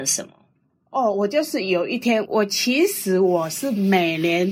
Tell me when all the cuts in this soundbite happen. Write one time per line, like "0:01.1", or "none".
0:02.3